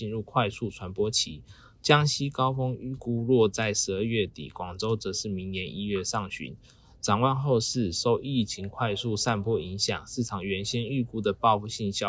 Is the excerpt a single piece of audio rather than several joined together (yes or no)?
yes